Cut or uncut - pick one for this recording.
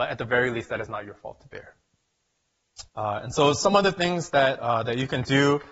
cut